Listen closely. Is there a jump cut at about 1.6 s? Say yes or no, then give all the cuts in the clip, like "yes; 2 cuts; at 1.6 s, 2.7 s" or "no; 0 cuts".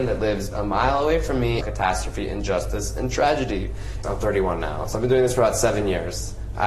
yes; 2 cuts; at 1.6 s, 4.0 s